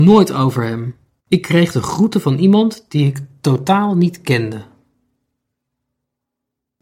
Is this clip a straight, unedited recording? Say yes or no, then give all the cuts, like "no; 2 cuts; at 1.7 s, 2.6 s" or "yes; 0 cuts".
no; 1 cut; at 1.2 s